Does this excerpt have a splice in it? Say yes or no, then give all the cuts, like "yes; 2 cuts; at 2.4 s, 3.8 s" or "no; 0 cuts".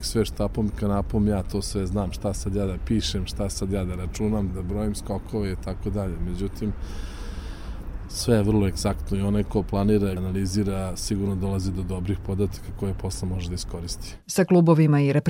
yes; 2 cuts; at 4.5 s, 10.2 s